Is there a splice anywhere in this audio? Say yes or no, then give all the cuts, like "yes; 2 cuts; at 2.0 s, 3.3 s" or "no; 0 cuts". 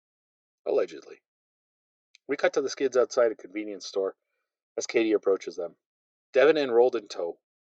no; 0 cuts